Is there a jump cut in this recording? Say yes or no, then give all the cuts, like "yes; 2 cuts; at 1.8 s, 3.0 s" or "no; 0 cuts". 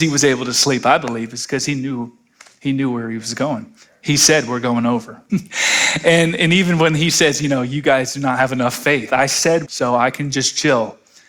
yes; 2 cuts; at 5.3 s, 9.7 s